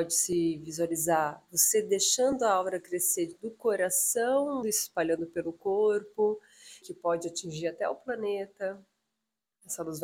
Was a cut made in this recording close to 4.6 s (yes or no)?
yes